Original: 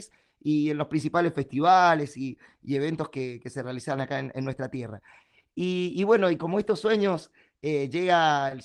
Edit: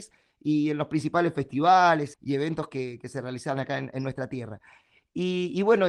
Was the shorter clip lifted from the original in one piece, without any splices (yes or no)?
no